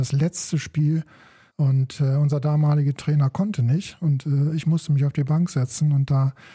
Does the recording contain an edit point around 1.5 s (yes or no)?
yes